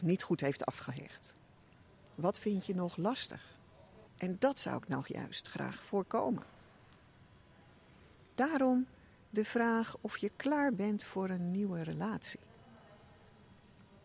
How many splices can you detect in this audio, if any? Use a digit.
2